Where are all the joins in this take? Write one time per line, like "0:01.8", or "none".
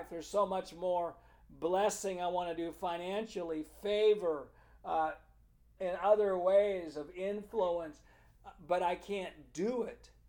0:05.8